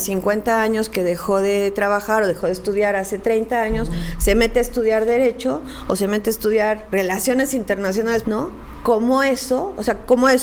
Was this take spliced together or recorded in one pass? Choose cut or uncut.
cut